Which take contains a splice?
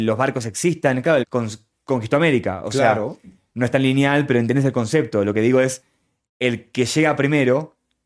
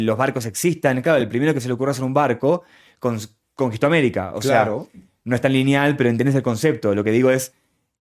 first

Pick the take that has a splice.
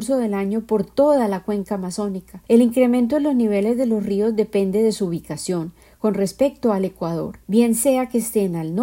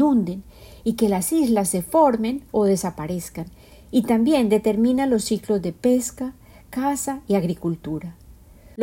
first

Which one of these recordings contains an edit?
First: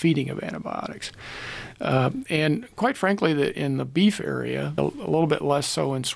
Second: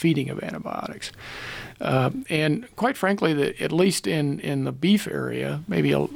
first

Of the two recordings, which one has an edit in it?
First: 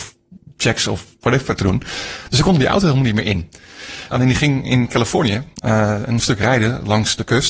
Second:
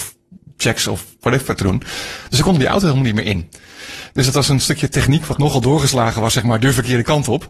first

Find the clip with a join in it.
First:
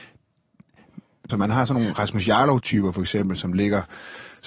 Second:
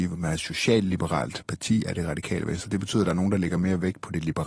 first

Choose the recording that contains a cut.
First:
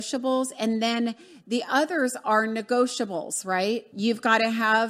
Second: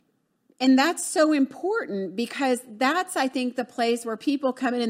first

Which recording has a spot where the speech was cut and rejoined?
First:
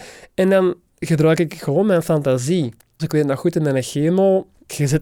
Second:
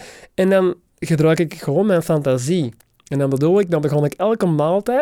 first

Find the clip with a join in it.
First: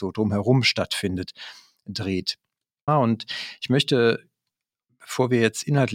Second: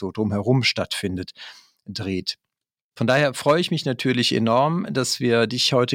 first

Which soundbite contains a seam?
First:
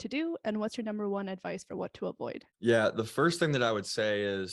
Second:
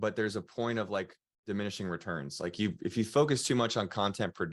first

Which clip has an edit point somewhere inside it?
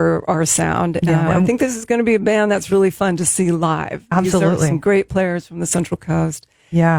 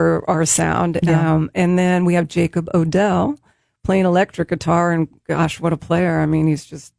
first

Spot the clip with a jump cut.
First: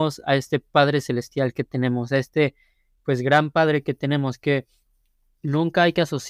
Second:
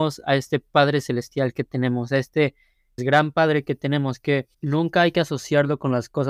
second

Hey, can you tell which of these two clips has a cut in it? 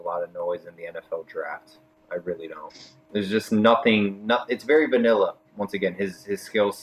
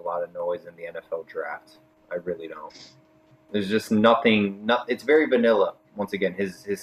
first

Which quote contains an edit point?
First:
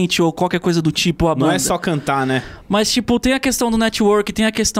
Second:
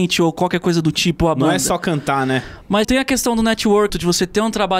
second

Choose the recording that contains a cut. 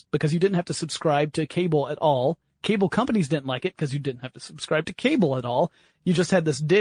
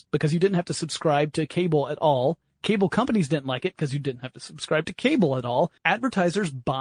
second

